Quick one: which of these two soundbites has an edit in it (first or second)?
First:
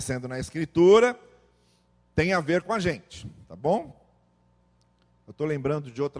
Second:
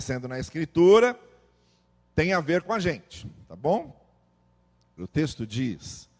second